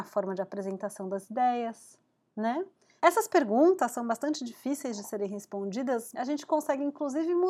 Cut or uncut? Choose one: cut